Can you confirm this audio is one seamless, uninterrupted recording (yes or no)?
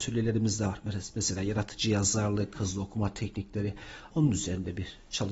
no